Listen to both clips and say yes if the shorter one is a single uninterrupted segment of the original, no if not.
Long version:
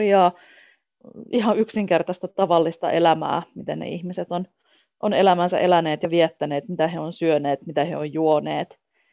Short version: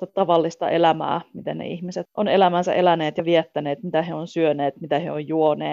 no